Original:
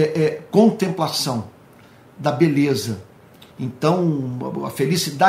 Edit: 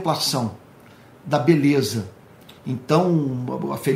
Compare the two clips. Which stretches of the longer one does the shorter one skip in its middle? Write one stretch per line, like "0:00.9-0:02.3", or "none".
none

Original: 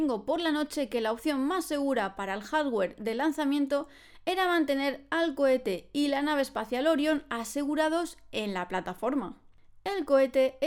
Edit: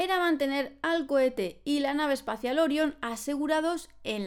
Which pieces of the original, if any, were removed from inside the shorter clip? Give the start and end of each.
none

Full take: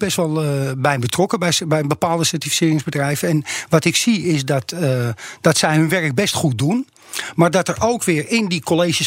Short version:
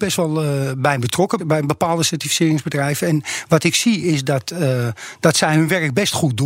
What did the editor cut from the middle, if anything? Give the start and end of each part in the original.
0:01.4-0:01.6

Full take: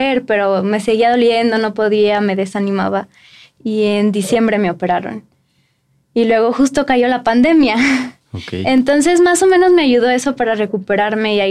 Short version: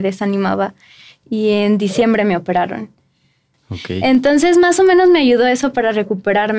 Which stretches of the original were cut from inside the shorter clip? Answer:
0:05.9-0:08.2

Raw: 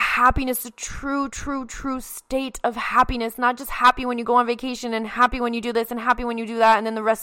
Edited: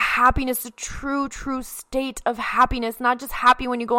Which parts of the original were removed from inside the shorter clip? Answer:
0:01.3-0:01.7

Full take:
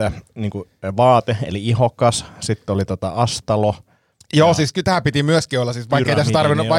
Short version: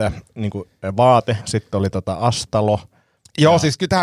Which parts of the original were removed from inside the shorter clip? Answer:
0:01.4-0:02.3

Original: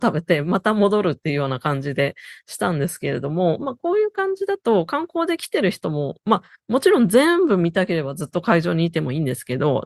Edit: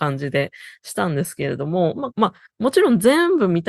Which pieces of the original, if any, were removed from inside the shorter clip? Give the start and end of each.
0:03.8-0:06.2

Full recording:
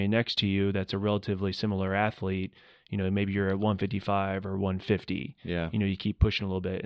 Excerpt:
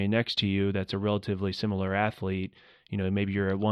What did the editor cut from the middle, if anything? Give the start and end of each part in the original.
none

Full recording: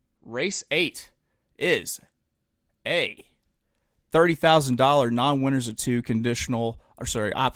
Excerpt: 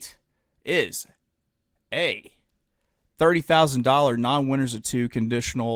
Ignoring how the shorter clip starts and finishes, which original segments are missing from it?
none

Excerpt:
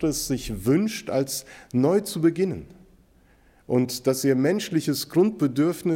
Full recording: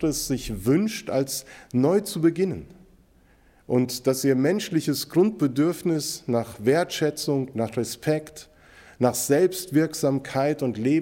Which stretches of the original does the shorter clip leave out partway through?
none

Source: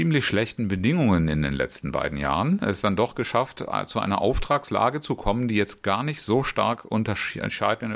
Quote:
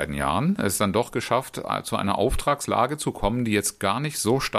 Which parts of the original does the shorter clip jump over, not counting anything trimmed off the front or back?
none

